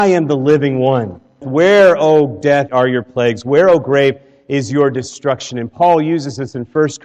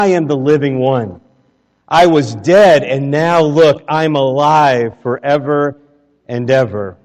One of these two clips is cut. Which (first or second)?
first